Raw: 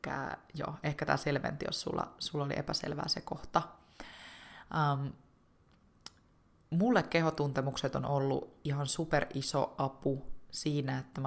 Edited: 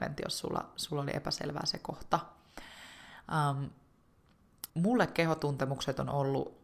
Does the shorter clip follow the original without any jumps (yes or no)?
no